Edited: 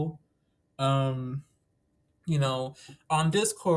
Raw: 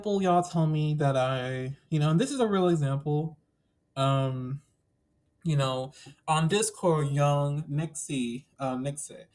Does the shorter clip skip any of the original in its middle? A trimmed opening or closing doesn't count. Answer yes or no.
no